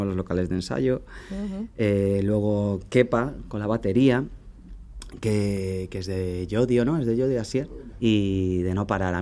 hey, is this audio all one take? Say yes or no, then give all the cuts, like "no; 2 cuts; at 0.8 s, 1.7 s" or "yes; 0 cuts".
no; 1 cut; at 8.0 s